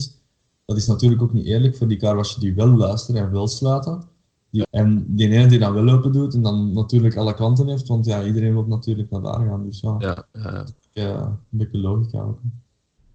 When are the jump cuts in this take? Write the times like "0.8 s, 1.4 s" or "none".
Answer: 4.6 s